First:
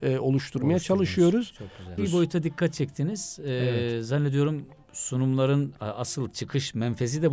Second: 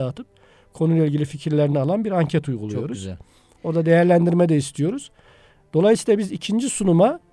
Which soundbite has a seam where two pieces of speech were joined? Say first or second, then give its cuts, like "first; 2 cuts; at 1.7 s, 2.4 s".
first; 1 cut; at 2.0 s